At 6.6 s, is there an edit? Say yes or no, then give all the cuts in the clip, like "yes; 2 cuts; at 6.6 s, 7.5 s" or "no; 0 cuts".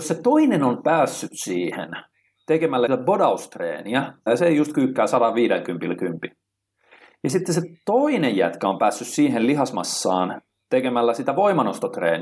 no; 2 cuts; at 2.9 s, 4.3 s